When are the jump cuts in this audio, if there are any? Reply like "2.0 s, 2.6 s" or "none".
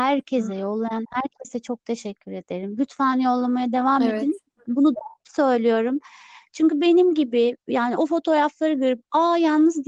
none